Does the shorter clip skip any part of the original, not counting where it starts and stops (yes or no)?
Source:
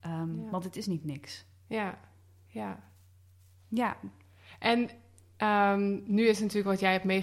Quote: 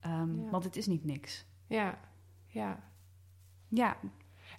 no